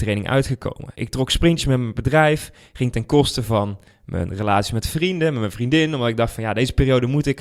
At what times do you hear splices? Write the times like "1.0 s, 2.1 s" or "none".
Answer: none